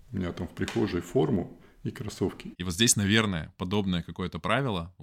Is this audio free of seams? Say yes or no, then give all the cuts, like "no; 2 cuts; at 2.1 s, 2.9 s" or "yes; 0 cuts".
no; 1 cut; at 2.5 s